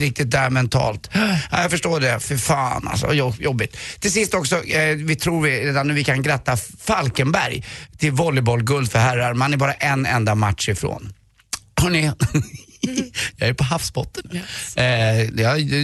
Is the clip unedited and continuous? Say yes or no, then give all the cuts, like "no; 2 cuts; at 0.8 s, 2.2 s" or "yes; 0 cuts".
no; 1 cut; at 14.2 s